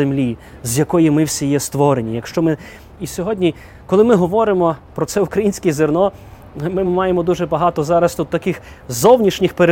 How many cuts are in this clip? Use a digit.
2